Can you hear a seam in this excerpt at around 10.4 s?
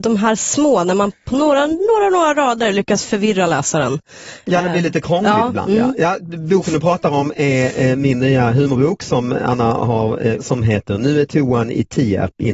yes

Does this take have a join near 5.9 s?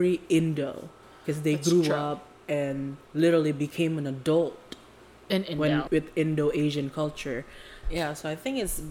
yes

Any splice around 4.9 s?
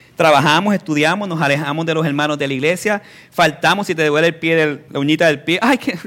yes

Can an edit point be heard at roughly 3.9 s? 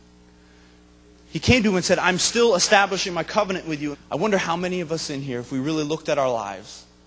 yes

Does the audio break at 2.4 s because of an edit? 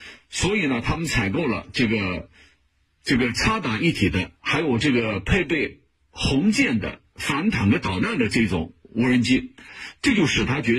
no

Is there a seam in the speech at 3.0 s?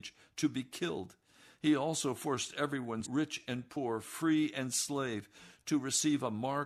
yes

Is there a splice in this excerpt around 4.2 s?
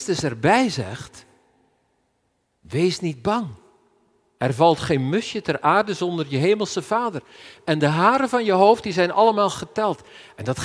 no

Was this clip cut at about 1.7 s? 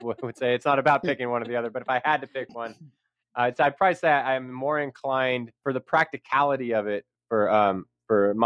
no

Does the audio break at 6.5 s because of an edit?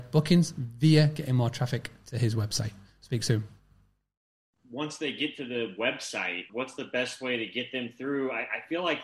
yes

